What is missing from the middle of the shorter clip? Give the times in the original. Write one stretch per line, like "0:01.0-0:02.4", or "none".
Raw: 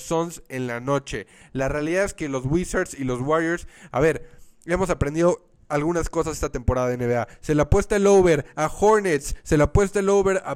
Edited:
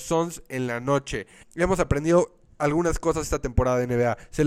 0:01.4-0:04.5